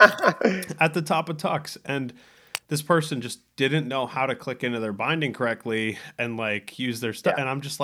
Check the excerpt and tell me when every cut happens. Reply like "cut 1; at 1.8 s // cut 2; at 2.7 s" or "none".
none